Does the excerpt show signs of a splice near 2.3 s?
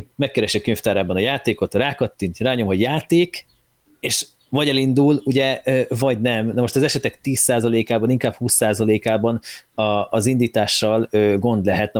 no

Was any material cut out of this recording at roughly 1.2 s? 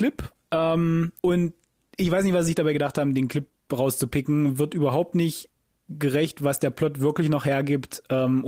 yes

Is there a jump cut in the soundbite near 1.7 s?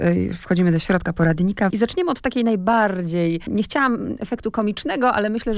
yes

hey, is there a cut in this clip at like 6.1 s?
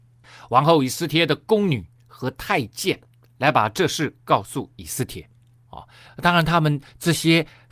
yes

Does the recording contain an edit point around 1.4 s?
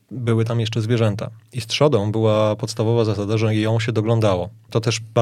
no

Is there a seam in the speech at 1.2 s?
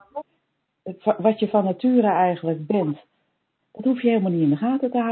no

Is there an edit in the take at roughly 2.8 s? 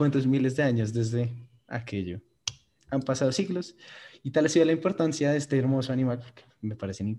yes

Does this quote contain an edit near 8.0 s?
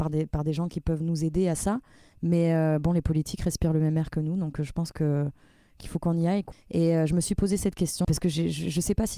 yes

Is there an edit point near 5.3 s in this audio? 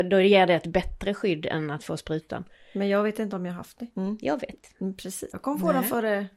yes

